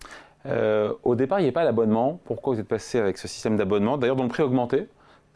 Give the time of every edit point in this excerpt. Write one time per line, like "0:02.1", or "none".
none